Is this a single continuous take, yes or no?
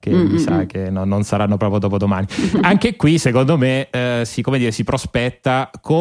yes